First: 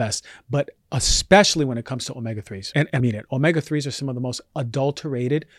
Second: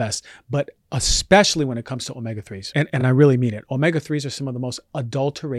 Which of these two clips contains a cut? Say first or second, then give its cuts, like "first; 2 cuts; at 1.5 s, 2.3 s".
first; 1 cut; at 3.0 s